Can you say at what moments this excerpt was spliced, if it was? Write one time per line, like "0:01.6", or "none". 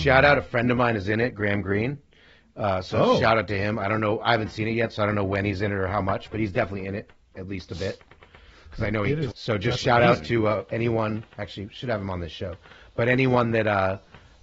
0:09.3